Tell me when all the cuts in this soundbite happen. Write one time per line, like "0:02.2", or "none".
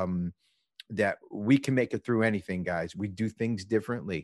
0:02.9